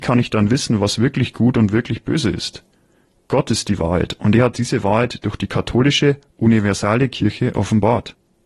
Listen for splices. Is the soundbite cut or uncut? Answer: uncut